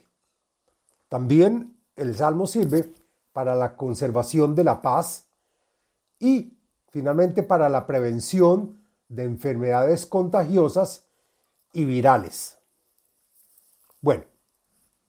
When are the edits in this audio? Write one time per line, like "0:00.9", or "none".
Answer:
none